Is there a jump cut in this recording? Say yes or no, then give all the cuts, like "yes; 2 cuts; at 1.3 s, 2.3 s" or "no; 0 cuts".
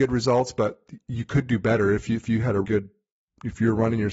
yes; 1 cut; at 2.6 s